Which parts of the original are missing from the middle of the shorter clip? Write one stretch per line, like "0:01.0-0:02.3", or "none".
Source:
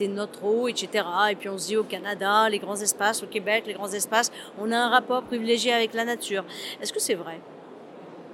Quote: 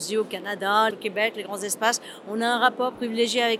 0:02.5-0:03.2

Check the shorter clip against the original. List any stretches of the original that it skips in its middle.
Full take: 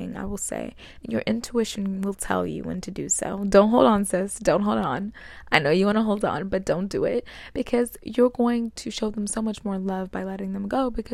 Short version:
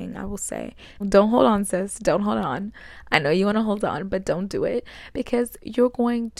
0:01.0-0:03.4

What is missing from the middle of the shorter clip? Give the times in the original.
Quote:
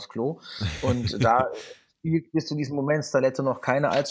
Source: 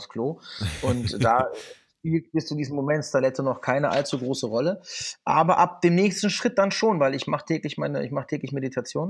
none

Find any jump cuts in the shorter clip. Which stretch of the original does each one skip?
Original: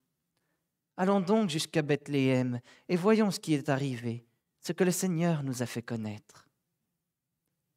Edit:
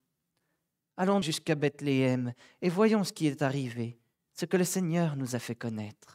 0:01.2-0:01.5

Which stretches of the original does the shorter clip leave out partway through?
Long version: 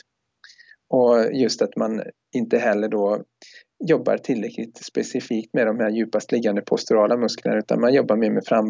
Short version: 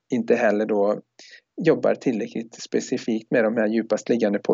none

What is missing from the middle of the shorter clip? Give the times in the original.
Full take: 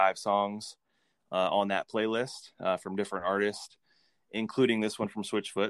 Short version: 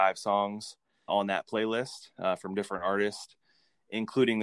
0:01.1-0:01.5

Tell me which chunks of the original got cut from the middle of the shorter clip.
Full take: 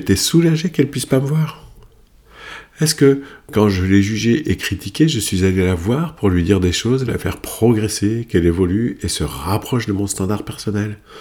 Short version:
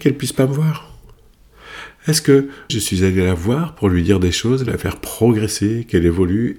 0:03.4-0:05.1

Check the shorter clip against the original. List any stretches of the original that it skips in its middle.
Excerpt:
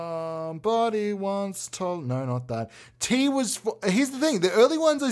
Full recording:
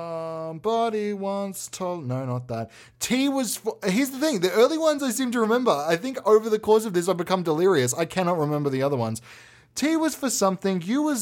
none

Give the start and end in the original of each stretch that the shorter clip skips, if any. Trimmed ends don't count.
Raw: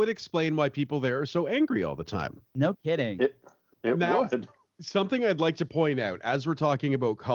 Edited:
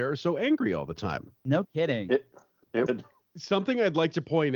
0:04.0-0:04.3

